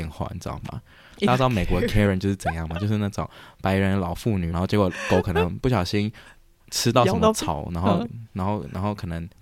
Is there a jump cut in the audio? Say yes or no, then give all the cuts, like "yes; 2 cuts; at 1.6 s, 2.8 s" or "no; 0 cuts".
yes; 1 cut; at 4.5 s